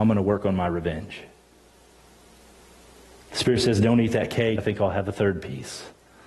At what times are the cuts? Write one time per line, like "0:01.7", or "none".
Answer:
0:04.6